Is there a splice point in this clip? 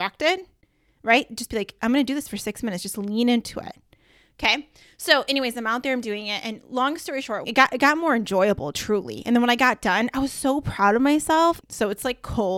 yes; 2 cuts; at 7.4 s, 11.6 s

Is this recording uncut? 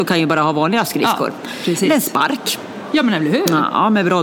yes; 0 cuts

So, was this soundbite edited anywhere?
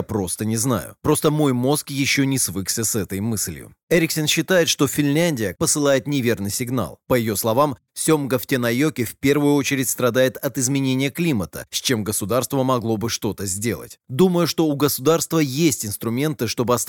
yes; 1 cut; at 5.5 s

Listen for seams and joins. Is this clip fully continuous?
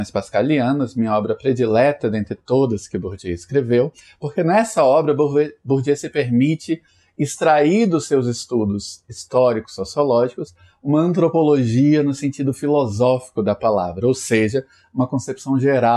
yes; 0 cuts

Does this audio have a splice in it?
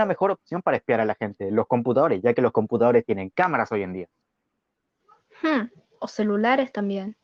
no; 0 cuts

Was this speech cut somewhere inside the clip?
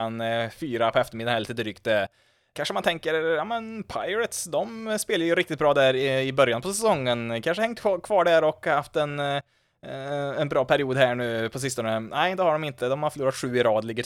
no; 0 cuts

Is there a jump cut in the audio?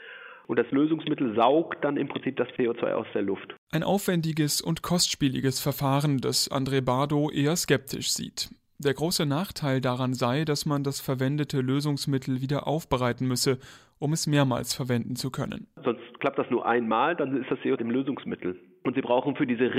yes; 1 cut; at 17.8 s

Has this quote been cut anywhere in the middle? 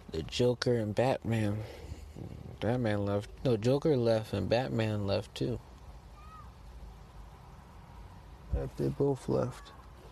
yes; 1 cut; at 3.4 s

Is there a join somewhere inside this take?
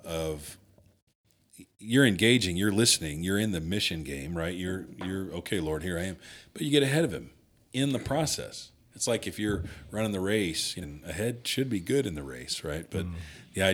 yes; 1 cut; at 10.8 s

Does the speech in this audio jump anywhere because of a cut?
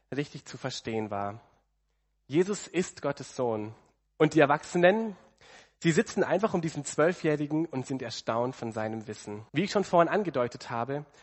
yes; 2 cuts; at 4.1 s, 9.5 s

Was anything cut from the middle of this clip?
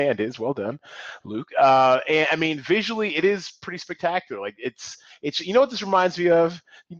no; 0 cuts

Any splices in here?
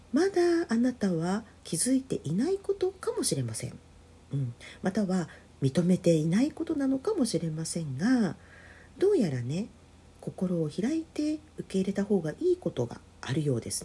no; 0 cuts

